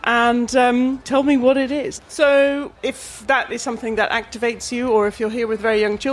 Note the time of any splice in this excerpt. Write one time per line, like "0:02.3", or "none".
0:02.0